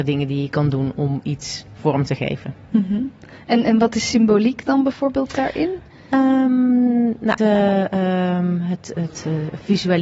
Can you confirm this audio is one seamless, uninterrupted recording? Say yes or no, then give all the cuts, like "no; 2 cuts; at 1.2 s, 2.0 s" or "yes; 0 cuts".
no; 1 cut; at 7.4 s